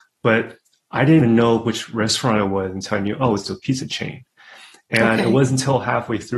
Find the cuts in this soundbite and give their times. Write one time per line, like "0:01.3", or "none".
none